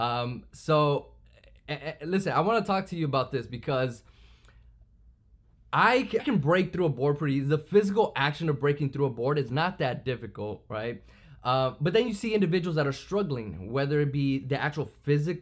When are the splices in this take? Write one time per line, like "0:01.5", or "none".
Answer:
0:06.2